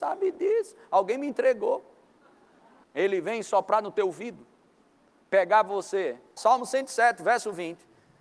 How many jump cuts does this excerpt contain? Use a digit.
2